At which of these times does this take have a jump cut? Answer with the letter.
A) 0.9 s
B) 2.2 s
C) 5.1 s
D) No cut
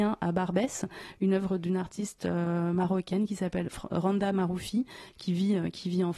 D